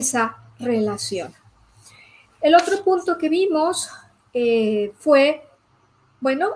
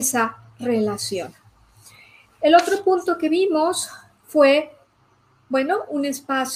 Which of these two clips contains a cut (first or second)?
second